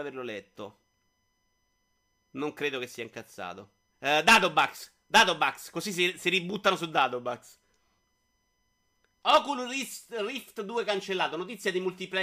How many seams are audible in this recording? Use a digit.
2